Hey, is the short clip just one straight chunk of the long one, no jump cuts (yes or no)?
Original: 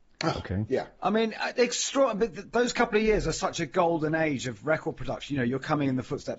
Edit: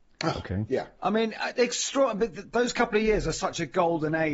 yes